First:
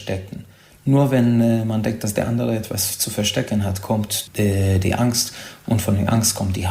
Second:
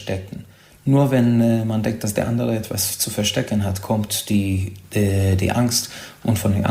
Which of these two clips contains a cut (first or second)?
first